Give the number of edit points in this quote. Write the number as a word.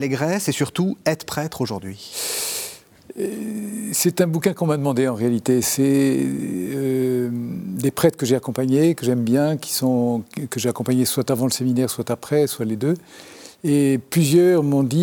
zero